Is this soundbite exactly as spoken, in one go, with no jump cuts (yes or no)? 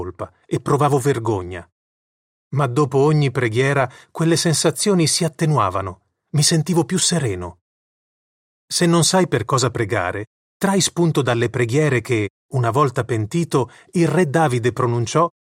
yes